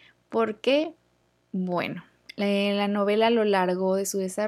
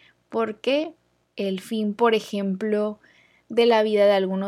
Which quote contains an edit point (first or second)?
second